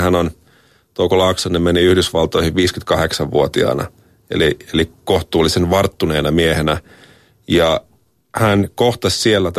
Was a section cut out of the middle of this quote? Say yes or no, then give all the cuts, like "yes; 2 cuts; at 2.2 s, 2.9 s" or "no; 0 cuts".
no; 0 cuts